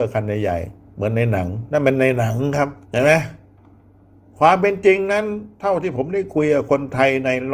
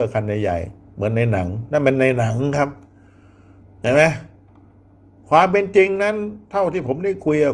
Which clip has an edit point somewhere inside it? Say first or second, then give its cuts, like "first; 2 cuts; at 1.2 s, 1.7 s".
first; 1 cut; at 2.8 s